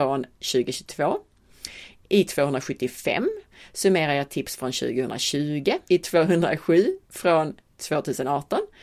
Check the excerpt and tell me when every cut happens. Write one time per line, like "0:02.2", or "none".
0:02.0
0:05.9